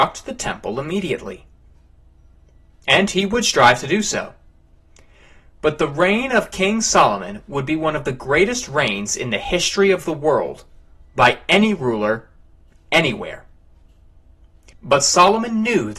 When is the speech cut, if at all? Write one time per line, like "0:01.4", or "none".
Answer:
0:14.7

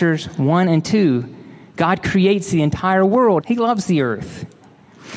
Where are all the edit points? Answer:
0:03.4

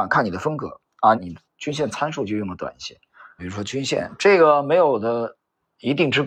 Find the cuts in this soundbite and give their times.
0:01.1
0:03.4

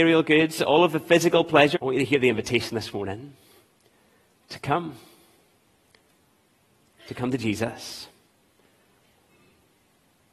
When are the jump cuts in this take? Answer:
0:01.7

